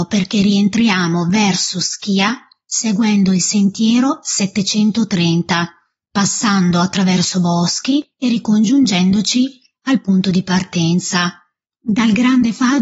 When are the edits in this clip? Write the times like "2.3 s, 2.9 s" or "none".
11.6 s